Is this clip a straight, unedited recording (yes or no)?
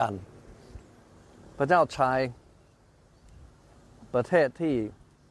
yes